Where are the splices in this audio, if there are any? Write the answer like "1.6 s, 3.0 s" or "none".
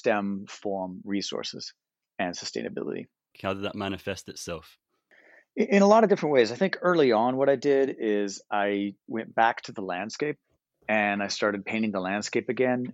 3.3 s, 9.1 s